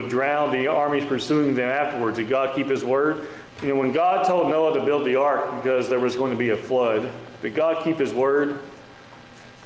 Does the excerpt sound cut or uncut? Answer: cut